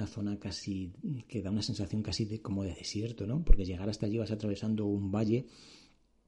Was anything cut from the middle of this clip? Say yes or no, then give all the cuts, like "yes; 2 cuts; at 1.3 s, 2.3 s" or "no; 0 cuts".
no; 0 cuts